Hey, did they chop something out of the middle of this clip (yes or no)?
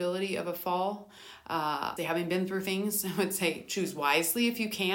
yes